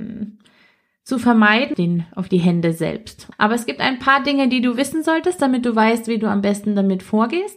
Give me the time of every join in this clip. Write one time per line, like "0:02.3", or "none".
0:01.7
0:03.3